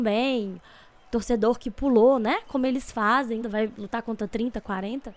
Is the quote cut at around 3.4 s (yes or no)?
yes